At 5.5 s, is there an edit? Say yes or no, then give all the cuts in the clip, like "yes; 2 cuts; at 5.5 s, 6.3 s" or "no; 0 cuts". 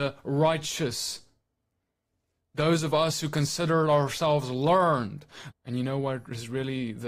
yes; 1 cut; at 5.5 s